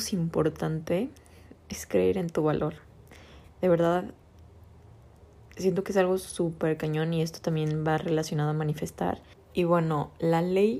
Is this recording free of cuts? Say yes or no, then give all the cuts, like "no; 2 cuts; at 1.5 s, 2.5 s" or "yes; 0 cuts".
no; 1 cut; at 9.3 s